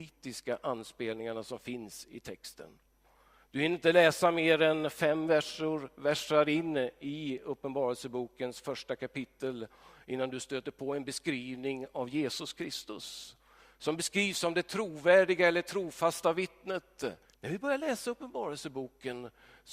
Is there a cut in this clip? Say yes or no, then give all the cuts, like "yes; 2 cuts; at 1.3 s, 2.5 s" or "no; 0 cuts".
yes; 1 cut; at 17.2 s